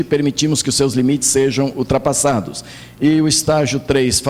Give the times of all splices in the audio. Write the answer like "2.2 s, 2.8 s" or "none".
2.9 s